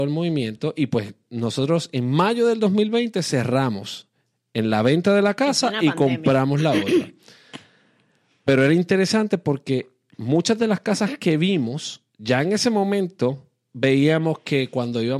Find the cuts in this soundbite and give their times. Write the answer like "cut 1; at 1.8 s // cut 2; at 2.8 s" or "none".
none

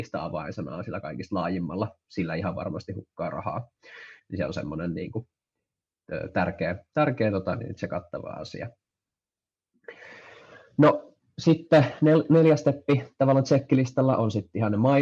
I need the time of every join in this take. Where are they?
none

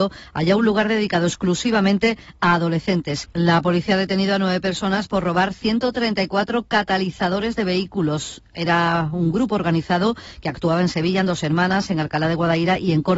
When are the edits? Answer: cut 1; at 3.2 s

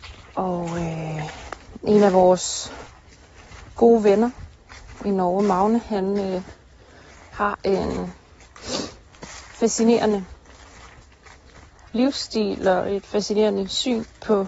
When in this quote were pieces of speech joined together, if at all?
none

